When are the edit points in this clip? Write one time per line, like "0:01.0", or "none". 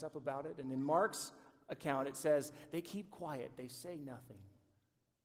none